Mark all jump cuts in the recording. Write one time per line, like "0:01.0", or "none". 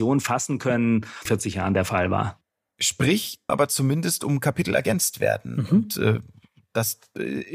0:01.3
0:03.5